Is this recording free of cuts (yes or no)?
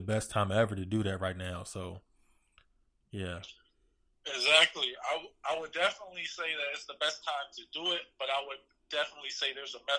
yes